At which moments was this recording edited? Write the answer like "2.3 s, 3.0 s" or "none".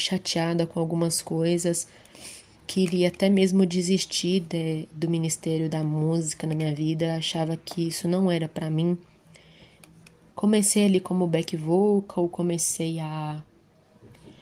10.3 s